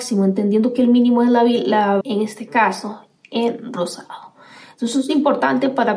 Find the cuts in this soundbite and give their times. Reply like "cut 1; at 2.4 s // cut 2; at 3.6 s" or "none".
cut 1; at 2.0 s